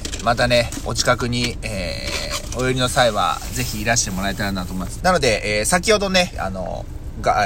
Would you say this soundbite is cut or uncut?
cut